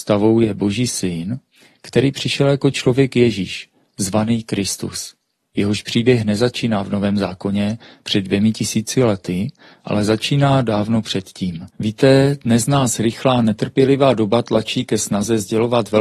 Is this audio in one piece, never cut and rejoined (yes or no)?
no